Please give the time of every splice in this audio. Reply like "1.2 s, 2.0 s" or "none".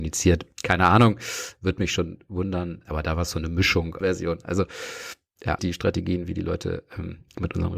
4.0 s, 5.6 s